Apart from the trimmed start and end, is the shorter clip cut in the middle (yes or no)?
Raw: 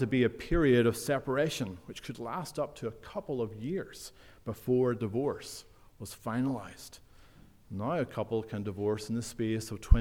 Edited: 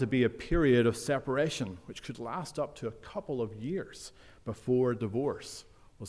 no